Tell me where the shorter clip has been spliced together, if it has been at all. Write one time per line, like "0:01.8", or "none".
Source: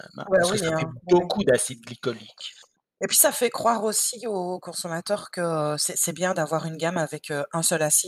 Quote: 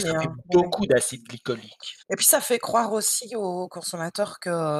0:02.0